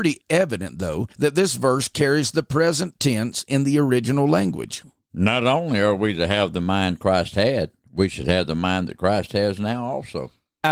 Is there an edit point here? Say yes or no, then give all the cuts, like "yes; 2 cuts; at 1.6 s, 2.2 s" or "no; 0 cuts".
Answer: no; 0 cuts